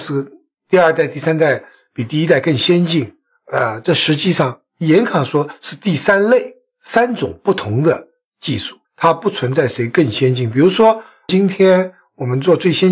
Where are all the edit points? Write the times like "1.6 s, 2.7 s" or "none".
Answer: 8.8 s

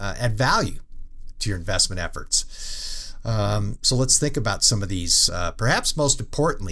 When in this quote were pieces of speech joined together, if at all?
5.3 s

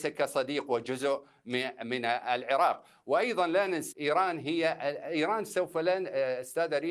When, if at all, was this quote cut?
3.9 s

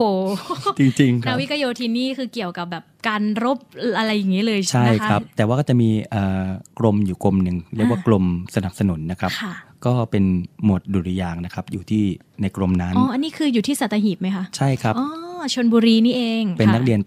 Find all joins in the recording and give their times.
13.1 s

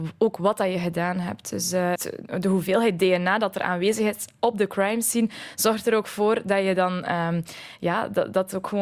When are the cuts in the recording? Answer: 2.0 s

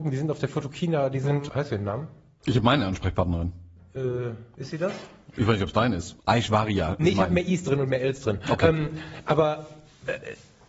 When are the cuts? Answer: 1.5 s, 6.2 s

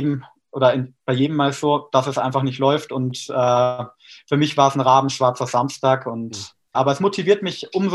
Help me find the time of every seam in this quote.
6.7 s

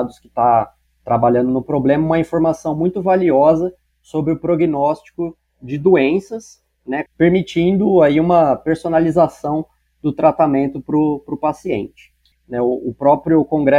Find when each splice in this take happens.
7.1 s, 12.3 s

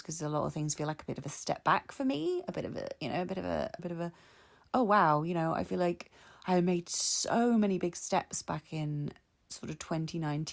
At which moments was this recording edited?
3.8 s

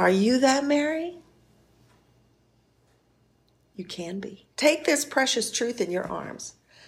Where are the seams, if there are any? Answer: 4.5 s

